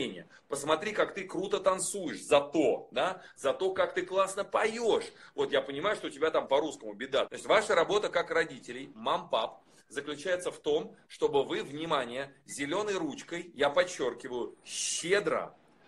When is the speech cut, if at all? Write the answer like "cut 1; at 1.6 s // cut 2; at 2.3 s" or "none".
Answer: cut 1; at 7.3 s